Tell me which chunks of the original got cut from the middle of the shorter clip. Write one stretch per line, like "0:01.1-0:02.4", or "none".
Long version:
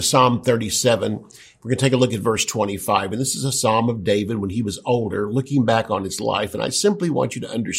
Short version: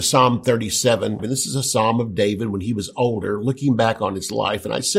0:01.2-0:03.1

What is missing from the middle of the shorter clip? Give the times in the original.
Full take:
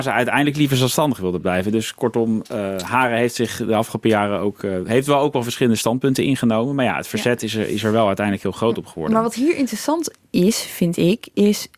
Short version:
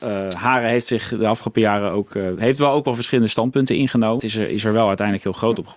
0:06.7-0:07.4

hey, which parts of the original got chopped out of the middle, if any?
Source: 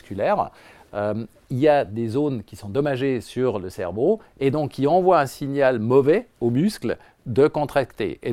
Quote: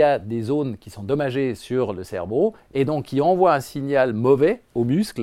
none

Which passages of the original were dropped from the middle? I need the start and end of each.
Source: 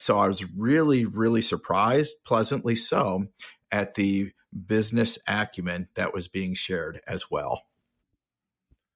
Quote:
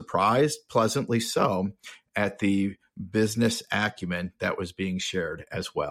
none

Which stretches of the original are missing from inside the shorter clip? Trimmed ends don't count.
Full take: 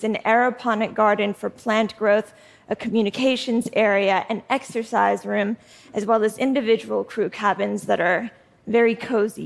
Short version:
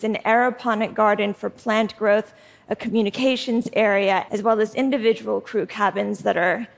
0:04.3-0:05.9

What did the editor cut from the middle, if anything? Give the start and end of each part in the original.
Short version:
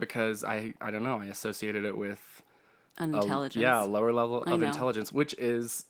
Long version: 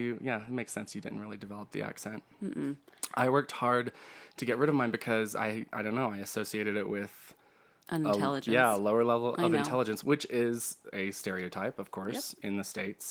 none

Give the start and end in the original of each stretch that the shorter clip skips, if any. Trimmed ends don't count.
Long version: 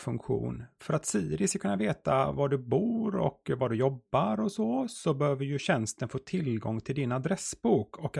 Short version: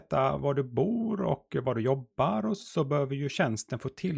0:04.5-0:04.9

